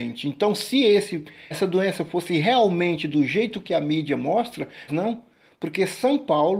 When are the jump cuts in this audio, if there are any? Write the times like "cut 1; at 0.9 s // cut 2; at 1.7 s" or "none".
cut 1; at 1.5 s // cut 2; at 4.9 s